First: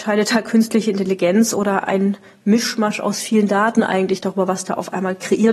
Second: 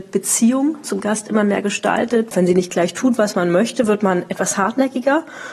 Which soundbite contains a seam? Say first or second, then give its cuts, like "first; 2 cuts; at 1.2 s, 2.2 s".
second; 1 cut; at 2.3 s